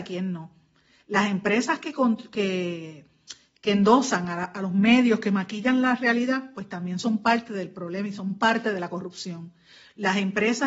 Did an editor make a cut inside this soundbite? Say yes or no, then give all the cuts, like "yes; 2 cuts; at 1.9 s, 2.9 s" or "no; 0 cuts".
no; 0 cuts